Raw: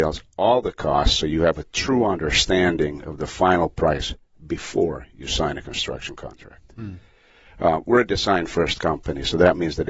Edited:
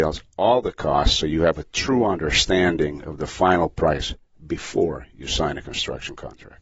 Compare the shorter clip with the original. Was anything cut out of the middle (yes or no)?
no